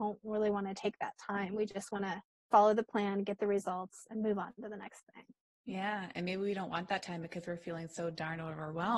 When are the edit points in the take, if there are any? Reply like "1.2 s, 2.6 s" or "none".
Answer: none